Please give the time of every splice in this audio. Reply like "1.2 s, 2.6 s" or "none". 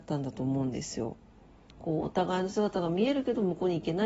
1.7 s